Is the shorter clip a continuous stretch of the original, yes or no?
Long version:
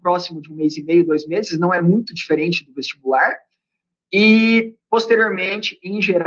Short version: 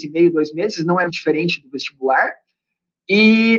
no